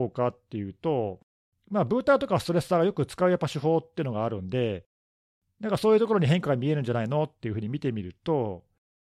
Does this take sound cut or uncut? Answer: uncut